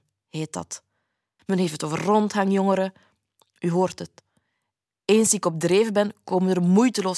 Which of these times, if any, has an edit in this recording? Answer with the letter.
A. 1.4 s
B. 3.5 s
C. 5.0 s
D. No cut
A